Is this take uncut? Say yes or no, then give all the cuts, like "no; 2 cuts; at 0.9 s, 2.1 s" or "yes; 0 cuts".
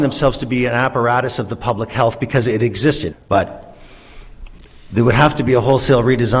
no; 1 cut; at 3.1 s